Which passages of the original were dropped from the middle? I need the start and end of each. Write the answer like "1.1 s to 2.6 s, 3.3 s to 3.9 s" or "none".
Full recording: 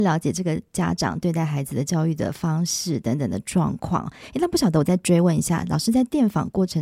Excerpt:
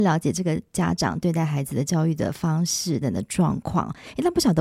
3.0 s to 3.2 s